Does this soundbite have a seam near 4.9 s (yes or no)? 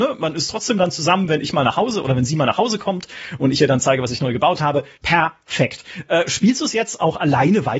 yes